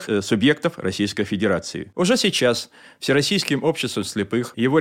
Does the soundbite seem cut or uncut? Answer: cut